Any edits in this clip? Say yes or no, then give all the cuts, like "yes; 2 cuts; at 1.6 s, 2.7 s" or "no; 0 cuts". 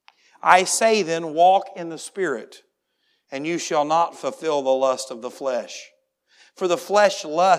no; 0 cuts